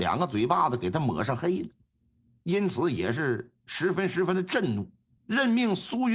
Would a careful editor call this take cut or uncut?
cut